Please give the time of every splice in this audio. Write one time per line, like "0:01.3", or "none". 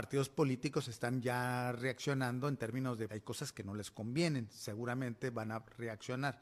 0:03.1